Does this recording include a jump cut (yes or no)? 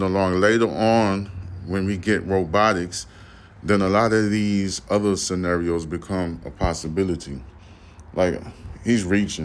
no